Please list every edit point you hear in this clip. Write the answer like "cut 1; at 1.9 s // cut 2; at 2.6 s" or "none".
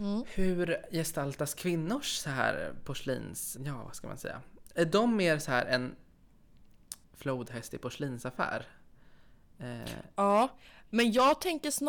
cut 1; at 3.6 s // cut 2; at 7.0 s